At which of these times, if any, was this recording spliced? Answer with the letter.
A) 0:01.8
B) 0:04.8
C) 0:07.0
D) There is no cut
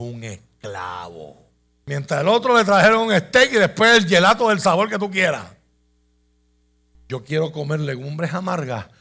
A